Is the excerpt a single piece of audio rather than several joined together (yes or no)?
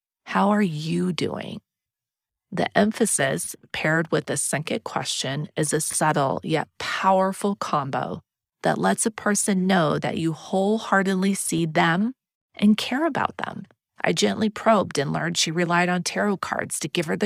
no